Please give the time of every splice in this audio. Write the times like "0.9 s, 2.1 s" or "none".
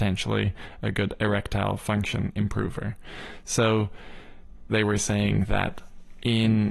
4.7 s